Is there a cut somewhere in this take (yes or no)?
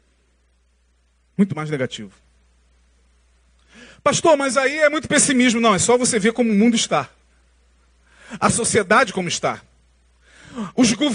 no